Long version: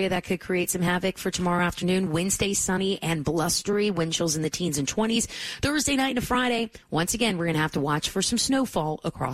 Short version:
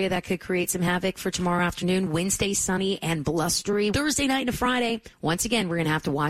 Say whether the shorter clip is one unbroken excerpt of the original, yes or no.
no